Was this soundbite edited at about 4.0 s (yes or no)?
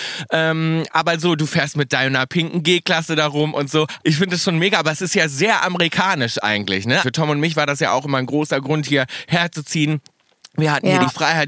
yes